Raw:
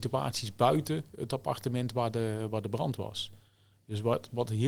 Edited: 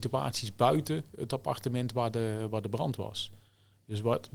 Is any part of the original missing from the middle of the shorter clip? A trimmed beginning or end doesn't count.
no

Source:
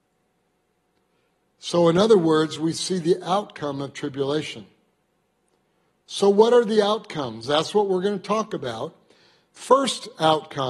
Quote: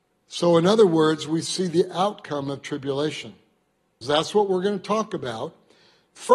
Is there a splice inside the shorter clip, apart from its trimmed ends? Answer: yes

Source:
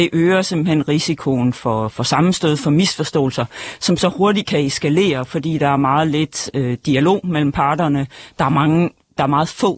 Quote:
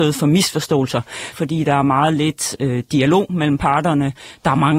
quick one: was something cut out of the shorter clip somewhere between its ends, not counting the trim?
yes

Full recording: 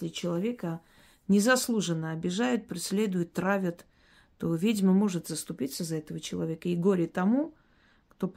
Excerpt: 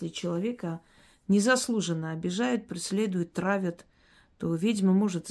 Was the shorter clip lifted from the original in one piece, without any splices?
yes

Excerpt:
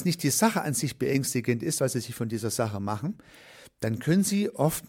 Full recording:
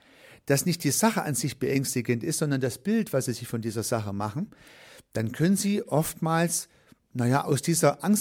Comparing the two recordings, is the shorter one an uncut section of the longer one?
no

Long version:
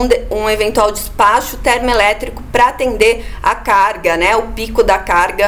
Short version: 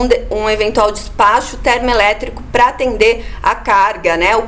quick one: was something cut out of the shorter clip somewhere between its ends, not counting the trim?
no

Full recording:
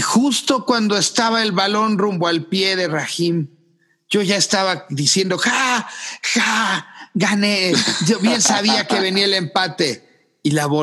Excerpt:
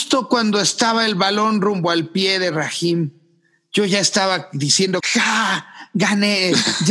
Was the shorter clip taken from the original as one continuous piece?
no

